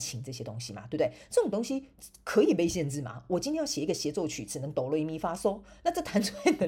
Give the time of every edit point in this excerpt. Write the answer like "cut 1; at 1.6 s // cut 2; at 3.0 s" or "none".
none